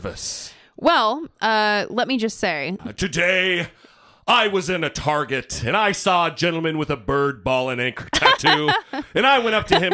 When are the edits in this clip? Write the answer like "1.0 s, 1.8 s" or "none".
2.8 s